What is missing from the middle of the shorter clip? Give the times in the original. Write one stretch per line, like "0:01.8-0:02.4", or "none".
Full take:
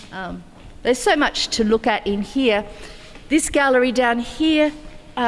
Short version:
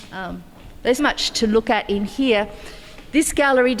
0:01.0-0:01.1